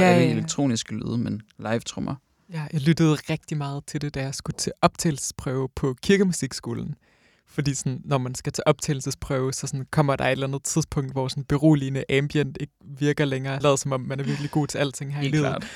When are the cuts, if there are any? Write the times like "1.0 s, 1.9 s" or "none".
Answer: 13.6 s